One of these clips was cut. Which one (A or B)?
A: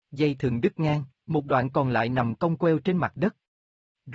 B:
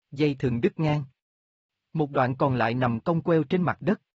A